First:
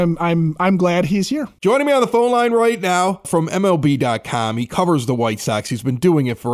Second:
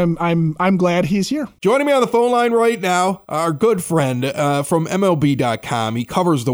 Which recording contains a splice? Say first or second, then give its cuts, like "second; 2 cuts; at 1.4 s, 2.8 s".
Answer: first; 1 cut; at 3.2 s